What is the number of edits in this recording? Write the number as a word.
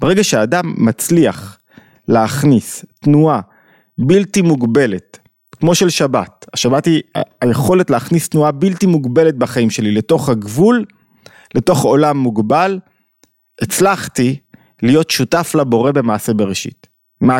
zero